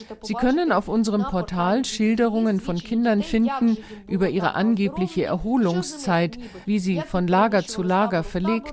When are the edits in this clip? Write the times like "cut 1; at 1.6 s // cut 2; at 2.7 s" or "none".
cut 1; at 6.6 s